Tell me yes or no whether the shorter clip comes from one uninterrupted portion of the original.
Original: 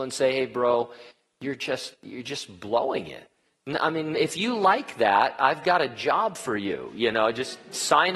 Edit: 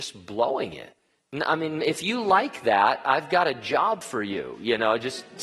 yes